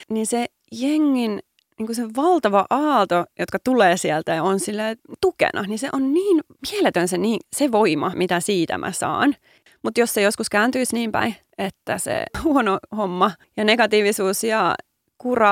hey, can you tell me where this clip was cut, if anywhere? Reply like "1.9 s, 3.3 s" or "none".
8.1 s, 9.7 s

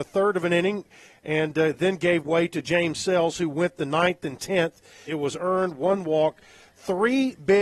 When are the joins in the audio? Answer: 5.1 s

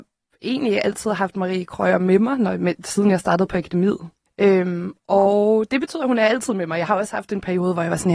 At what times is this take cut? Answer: 4.3 s

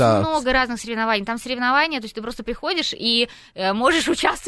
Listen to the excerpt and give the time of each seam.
none

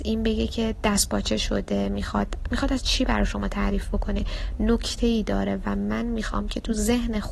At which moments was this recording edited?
none

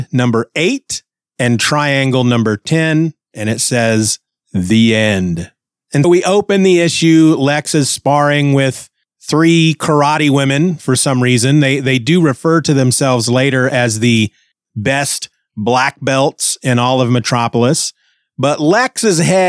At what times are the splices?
6.0 s

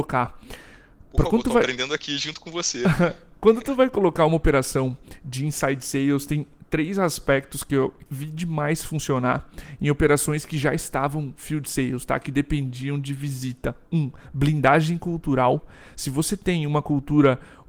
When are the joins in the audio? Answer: none

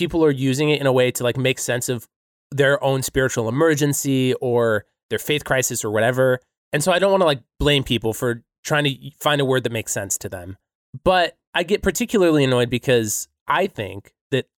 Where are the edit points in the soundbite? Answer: none

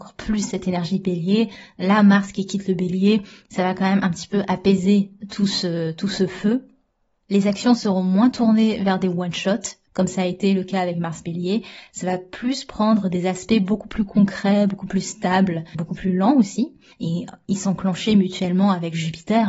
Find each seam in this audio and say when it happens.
15.7 s, 16.9 s

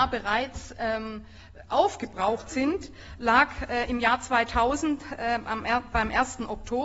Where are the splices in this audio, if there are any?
none

